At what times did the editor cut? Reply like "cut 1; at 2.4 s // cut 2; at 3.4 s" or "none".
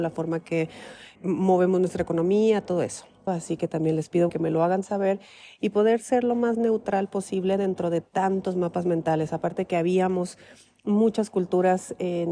cut 1; at 1.2 s // cut 2; at 3.3 s // cut 3; at 4.3 s